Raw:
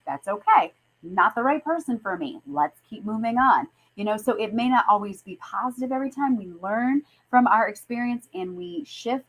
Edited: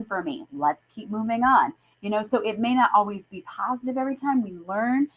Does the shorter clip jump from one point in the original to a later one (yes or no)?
no